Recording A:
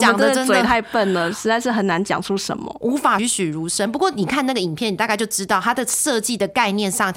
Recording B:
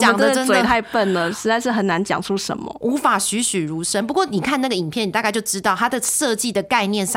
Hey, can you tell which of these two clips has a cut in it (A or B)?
A